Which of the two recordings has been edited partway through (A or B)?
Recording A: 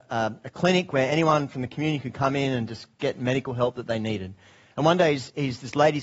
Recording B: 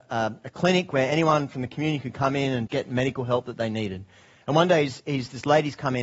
B